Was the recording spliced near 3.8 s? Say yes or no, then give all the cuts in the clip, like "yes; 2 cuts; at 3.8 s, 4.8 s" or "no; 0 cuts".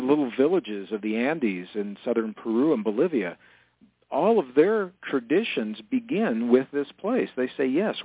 no; 0 cuts